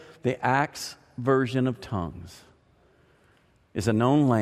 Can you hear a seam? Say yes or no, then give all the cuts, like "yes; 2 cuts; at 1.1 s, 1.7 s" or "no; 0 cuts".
no; 0 cuts